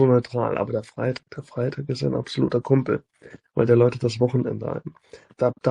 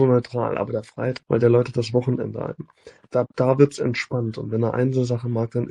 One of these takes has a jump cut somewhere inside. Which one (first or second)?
second